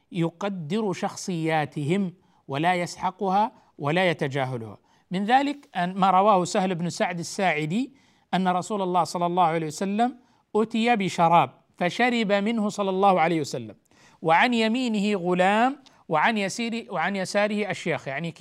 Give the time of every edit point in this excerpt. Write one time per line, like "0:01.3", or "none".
none